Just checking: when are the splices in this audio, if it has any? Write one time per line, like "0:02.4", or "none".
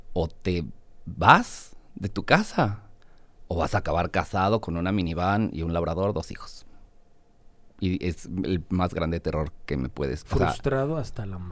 none